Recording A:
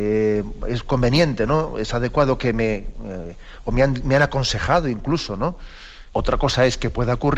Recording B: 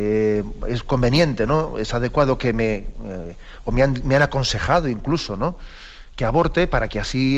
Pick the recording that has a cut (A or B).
A